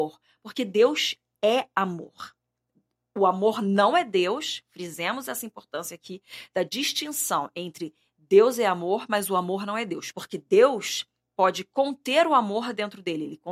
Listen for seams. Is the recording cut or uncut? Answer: cut